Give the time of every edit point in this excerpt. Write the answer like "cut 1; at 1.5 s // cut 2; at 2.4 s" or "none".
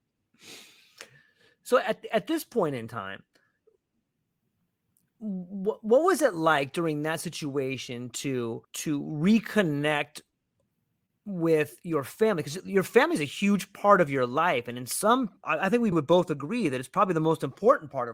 cut 1; at 8.6 s // cut 2; at 15.9 s